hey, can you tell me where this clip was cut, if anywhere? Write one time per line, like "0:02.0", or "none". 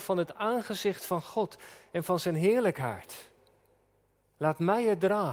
0:04.3